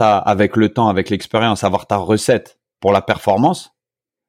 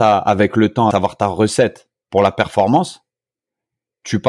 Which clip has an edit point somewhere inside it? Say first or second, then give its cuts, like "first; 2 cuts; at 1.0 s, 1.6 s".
second; 1 cut; at 0.9 s